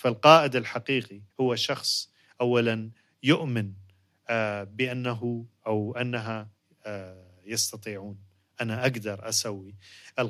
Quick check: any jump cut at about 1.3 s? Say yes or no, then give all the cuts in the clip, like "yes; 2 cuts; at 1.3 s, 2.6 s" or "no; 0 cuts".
yes; 1 cut; at 1.3 s